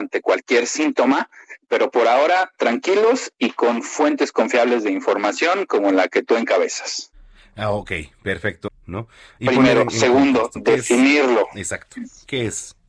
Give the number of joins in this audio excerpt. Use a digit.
1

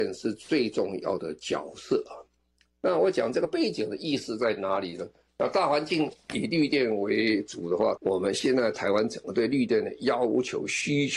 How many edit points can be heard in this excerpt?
2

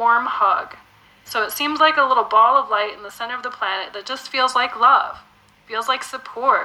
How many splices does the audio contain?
1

